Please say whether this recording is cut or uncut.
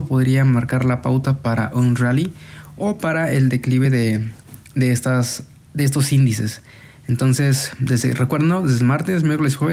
uncut